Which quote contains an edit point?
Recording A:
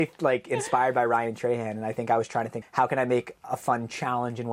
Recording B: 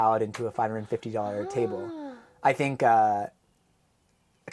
A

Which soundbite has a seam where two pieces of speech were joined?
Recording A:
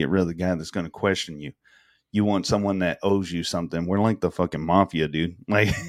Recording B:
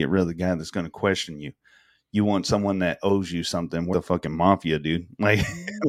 B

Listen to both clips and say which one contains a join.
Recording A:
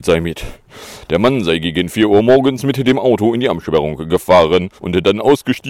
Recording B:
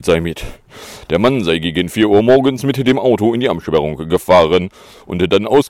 A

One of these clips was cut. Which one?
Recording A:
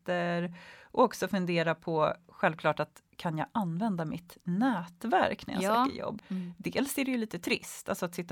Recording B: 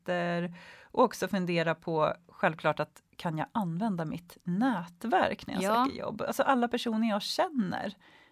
A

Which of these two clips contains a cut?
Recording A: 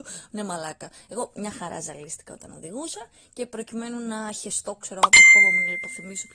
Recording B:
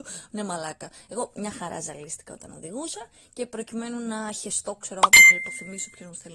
B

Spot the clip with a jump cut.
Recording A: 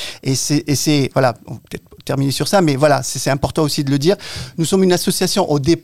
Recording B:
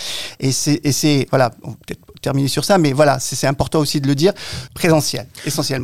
B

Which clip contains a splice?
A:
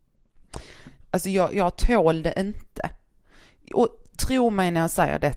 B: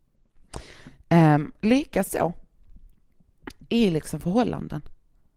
A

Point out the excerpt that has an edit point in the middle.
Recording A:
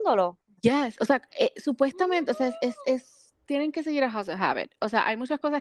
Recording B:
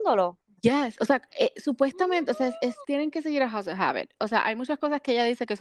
B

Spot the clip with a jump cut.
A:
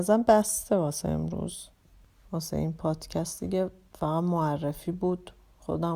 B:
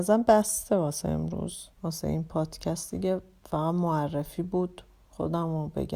B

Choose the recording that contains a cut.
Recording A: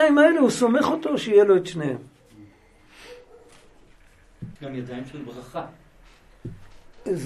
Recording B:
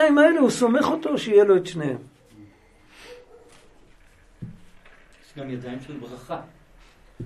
A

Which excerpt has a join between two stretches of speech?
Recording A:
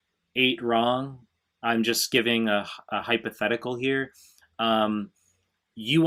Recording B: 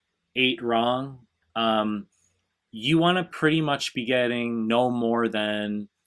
B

